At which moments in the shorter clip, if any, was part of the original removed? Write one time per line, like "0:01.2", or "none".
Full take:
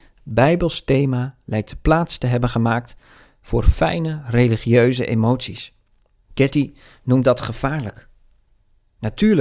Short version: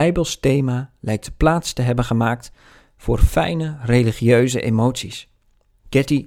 none